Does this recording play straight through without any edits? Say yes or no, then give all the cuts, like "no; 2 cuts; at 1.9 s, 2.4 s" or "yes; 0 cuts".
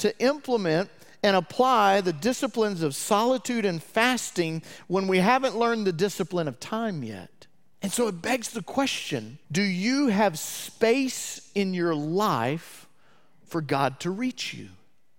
no; 2 cuts; at 7.7 s, 9.4 s